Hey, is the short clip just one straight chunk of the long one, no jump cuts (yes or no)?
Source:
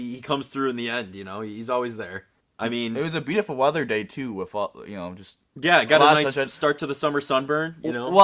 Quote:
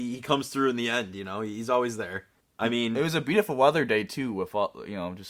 yes